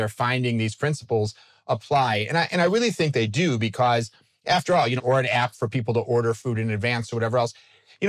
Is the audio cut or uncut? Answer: cut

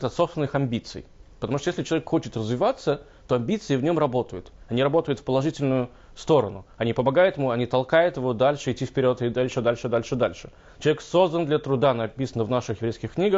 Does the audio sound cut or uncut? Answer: uncut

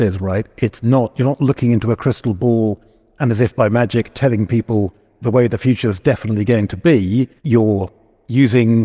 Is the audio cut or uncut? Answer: cut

